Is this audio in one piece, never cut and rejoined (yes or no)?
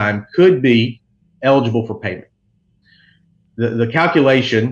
no